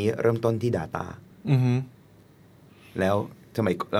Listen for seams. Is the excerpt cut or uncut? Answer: uncut